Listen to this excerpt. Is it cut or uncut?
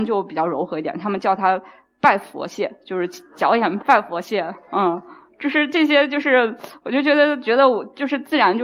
cut